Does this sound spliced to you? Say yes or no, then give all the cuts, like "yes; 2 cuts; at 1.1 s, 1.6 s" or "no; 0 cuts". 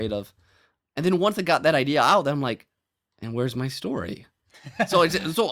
no; 0 cuts